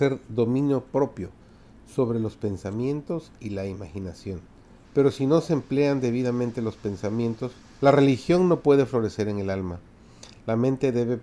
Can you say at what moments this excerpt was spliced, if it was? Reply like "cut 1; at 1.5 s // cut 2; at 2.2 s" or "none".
cut 1; at 4.8 s // cut 2; at 7.7 s

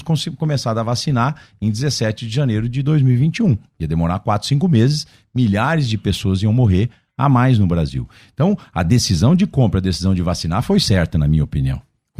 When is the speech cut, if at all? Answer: none

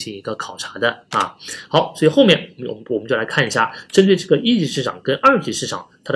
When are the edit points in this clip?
none

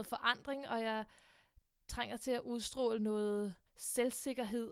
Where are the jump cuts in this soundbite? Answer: cut 1; at 3.7 s

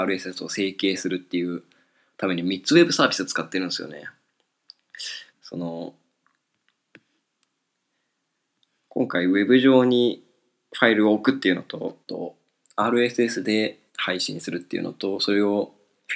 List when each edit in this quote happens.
cut 1; at 5.3 s // cut 2; at 12.0 s // cut 3; at 13.9 s

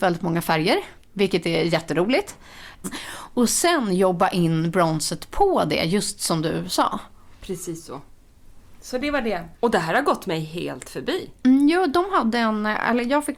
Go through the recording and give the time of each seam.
cut 1; at 1.0 s // cut 2; at 2.8 s // cut 3; at 9.5 s

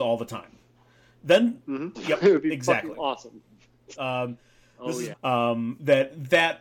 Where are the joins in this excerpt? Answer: cut 1; at 1.9 s // cut 2; at 3.9 s // cut 3; at 5.1 s

